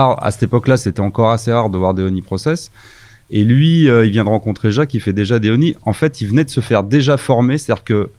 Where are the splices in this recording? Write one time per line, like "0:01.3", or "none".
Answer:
none